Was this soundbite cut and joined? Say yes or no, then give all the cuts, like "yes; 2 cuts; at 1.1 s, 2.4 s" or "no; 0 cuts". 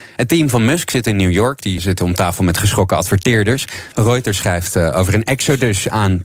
yes; 2 cuts; at 1.8 s, 3.9 s